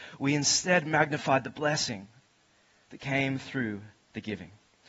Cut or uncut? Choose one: uncut